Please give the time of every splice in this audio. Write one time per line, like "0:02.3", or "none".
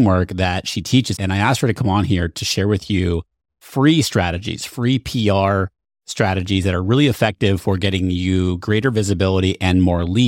0:01.2